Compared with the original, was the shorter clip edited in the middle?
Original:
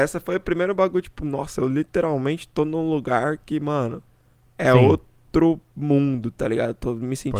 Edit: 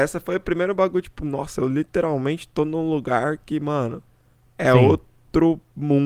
no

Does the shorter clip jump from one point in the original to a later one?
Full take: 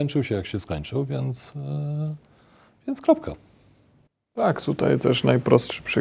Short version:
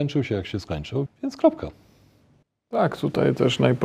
yes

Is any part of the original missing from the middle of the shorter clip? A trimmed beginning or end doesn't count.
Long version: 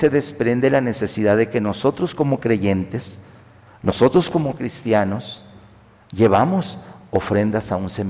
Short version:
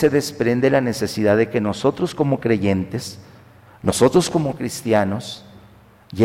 no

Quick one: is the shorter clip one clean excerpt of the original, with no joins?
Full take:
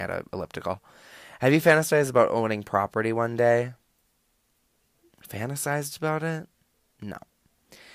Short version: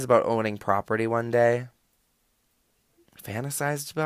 yes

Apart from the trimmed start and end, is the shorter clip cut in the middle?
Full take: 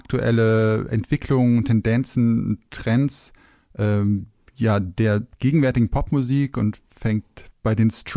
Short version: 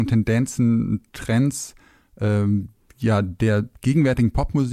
no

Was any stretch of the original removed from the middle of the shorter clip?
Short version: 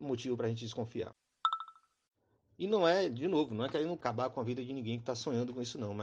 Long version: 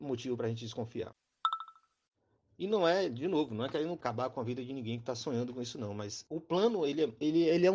no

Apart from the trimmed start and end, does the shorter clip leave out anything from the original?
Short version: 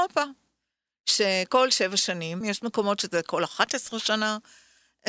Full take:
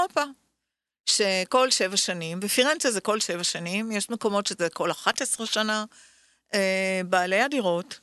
yes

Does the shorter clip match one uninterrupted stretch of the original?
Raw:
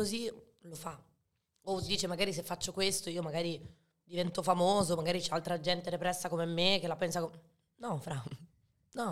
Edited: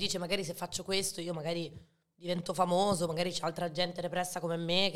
yes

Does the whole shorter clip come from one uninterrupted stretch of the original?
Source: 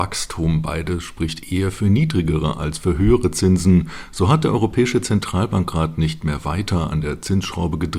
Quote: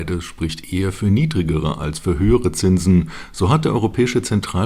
yes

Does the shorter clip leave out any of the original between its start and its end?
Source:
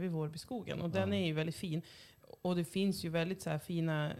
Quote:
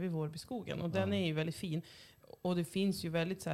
no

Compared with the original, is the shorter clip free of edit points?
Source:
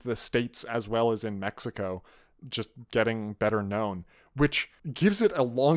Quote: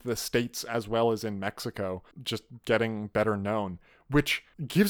no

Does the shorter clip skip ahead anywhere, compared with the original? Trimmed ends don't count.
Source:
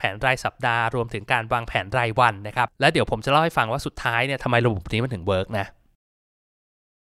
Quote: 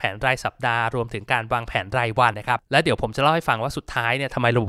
yes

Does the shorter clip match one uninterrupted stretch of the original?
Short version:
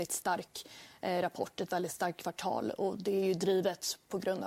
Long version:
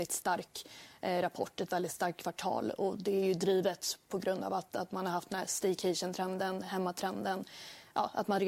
yes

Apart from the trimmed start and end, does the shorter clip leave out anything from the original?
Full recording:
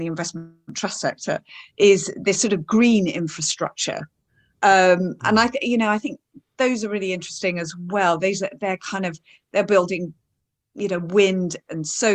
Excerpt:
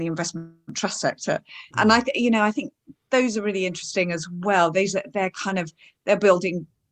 yes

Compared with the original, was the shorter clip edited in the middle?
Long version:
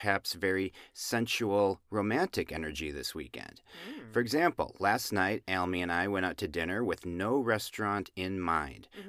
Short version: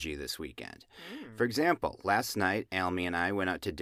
no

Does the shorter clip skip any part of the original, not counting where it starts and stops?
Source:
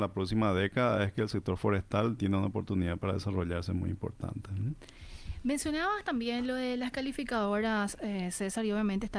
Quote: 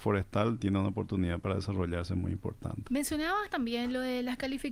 yes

